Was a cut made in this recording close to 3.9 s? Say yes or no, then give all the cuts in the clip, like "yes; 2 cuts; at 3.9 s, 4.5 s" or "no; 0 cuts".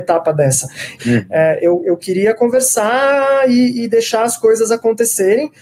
no; 1 cut; at 1.0 s